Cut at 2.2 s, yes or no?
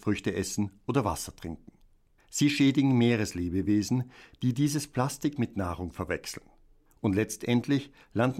yes